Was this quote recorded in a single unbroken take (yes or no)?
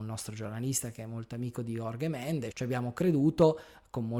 no